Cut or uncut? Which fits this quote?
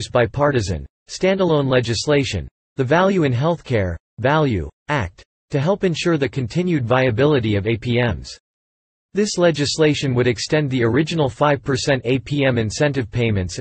uncut